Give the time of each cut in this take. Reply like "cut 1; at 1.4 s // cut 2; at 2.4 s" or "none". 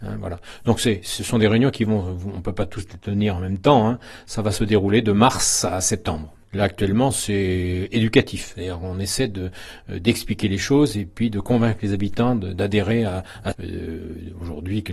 cut 1; at 13.5 s